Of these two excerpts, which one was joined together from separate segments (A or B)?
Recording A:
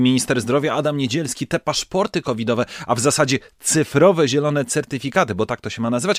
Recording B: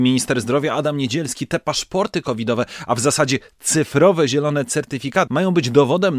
B